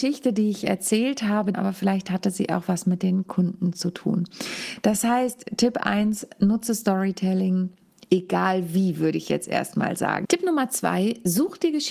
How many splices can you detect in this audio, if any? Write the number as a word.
two